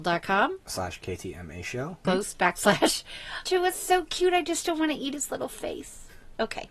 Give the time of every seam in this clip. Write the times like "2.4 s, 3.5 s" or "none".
2.0 s, 3.5 s